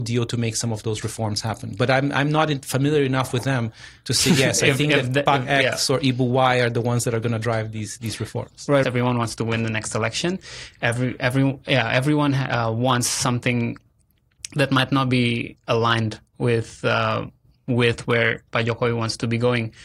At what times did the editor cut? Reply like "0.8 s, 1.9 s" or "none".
8.8 s